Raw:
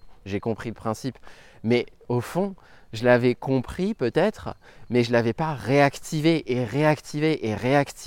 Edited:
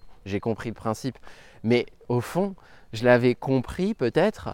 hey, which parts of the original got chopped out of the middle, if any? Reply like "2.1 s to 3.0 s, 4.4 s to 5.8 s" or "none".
none